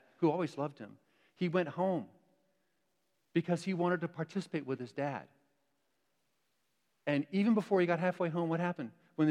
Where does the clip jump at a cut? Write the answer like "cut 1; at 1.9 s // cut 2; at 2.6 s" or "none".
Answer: none